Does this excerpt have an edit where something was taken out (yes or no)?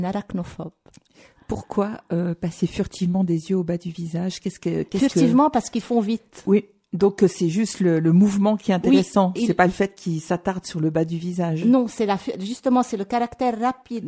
no